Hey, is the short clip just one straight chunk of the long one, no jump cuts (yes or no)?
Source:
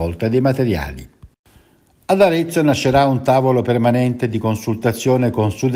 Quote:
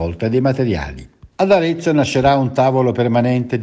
no